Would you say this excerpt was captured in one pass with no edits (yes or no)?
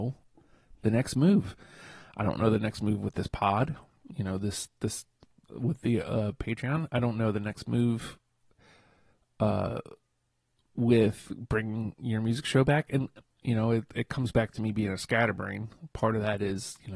yes